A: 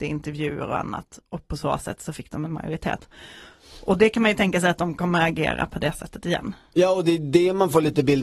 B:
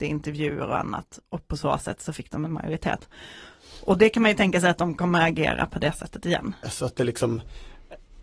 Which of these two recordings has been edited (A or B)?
B